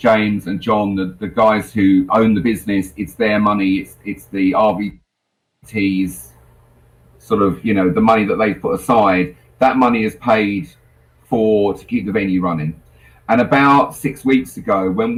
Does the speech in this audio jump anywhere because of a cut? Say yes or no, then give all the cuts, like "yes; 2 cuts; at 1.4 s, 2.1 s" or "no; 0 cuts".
yes; 1 cut; at 2.1 s